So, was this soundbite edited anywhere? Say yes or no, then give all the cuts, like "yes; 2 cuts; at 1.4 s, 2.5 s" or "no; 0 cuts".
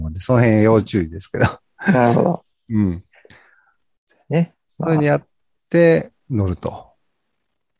no; 0 cuts